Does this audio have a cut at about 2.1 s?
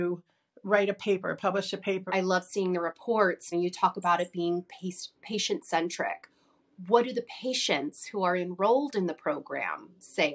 yes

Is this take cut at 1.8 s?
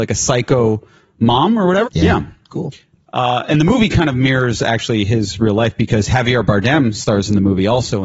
yes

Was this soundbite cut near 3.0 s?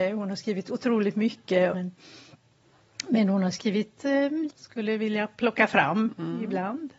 no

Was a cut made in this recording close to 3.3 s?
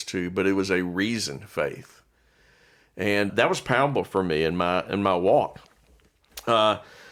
yes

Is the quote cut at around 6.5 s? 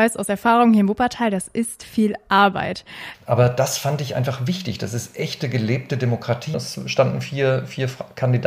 yes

